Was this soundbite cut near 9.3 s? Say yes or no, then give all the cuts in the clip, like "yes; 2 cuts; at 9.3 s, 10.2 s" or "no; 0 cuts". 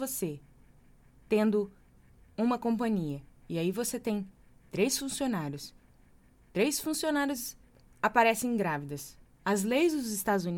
yes; 1 cut; at 9.3 s